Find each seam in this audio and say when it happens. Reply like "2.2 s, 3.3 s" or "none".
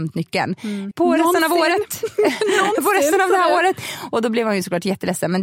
0.9 s

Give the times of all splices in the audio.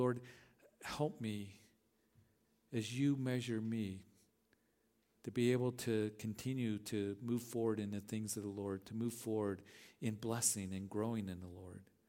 none

